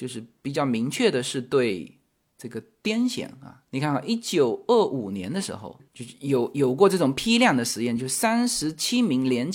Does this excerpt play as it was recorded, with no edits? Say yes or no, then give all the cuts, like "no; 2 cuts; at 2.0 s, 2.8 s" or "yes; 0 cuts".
yes; 0 cuts